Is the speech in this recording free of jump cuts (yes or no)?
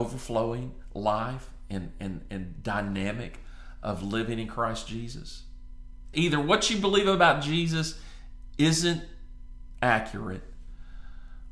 no